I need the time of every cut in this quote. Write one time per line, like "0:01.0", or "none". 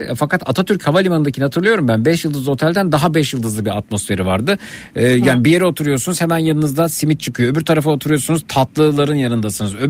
none